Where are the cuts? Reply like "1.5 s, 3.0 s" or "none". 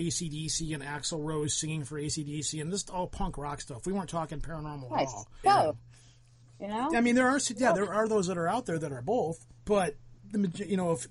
5.4 s, 9.6 s